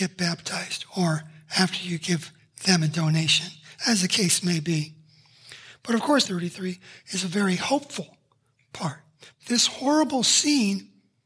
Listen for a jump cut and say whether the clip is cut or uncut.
cut